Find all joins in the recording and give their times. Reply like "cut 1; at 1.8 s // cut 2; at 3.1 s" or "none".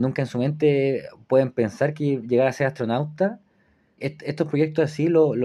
cut 1; at 4.0 s